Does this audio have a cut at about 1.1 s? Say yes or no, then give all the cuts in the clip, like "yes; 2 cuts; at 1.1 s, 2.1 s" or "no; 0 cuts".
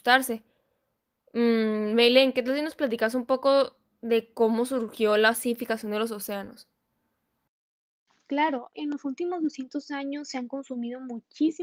no; 1 cut; at 8.7 s